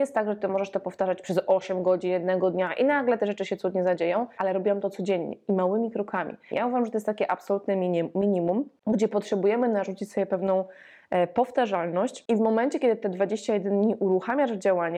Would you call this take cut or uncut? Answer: cut